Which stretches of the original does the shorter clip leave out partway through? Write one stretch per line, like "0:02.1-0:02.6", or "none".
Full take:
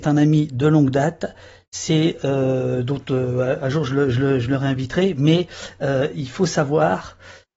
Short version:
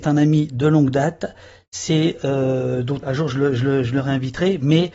0:03.0-0:03.6